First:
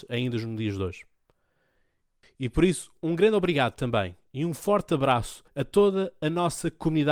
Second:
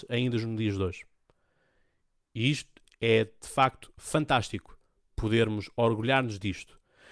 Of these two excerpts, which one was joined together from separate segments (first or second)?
first